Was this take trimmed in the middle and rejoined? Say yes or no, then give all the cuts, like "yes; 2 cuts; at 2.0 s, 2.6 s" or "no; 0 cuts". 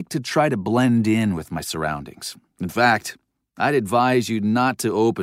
yes; 1 cut; at 2.5 s